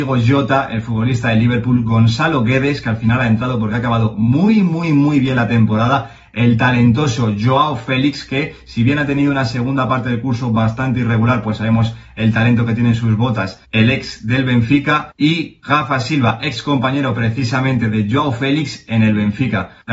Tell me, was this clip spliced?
no; 0 cuts

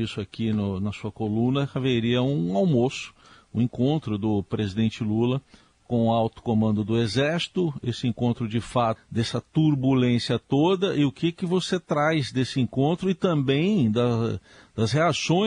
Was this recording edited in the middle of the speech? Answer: yes; 1 cut; at 9.0 s

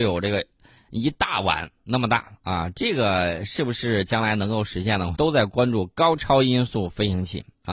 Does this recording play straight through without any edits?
no; 1 cut; at 5.1 s

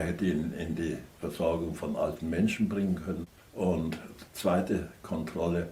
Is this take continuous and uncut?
yes; 0 cuts

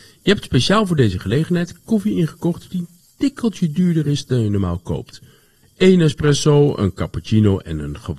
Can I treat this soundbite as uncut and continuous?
no; 1 cut; at 5.6 s

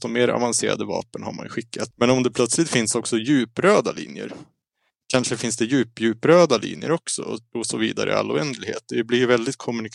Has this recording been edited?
yes; 1 cut; at 1.9 s

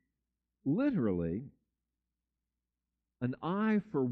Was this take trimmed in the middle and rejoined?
yes; 1 cut; at 3.0 s

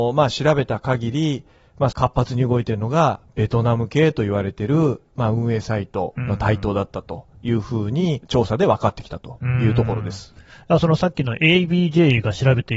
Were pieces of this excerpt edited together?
yes; 2 cuts; at 1.9 s, 8.2 s

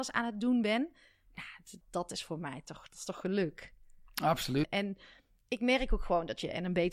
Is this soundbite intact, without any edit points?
no; 2 cuts; at 1.8 s, 4.6 s

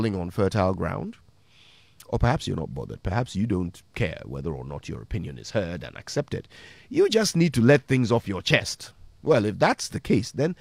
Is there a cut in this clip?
no; 0 cuts

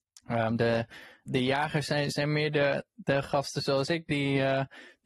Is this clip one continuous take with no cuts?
no; 1 cut; at 1.2 s

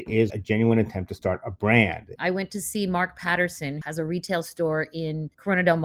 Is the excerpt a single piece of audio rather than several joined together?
no; 2 cuts; at 2.2 s, 3.8 s

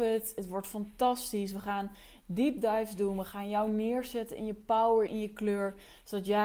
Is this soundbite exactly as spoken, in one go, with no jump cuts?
no; 1 cut; at 5.1 s

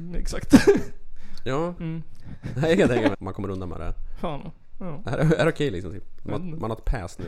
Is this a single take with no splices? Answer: no; 3 cuts; at 1.8 s, 3.1 s, 4.7 s

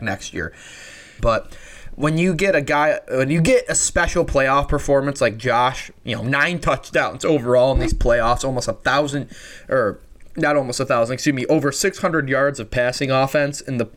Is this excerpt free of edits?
no; 1 cut; at 1.2 s

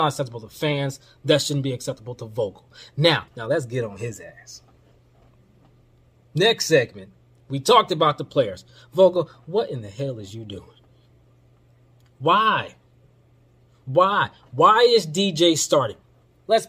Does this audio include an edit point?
yes; 1 cut; at 3.3 s

